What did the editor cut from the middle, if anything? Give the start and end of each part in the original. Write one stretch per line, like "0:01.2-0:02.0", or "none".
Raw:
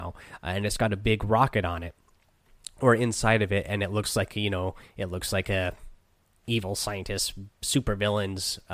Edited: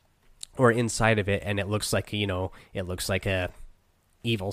none